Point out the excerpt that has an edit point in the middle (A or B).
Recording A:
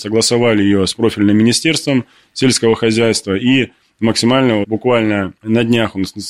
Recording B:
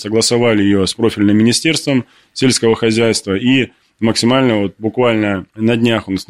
A